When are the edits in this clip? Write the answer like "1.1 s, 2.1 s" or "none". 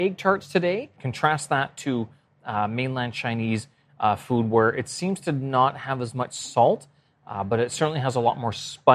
1.0 s